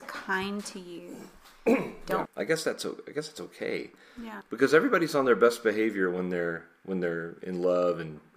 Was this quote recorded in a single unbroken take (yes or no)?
no